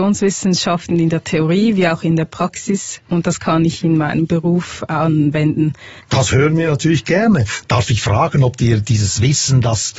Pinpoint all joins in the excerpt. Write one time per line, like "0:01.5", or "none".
0:06.0
0:07.6